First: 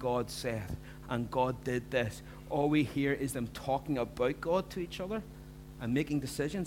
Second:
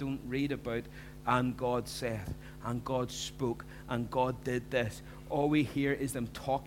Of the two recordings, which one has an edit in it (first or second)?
first